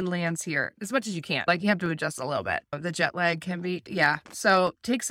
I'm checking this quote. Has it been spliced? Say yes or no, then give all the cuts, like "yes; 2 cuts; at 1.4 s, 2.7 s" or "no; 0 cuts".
no; 0 cuts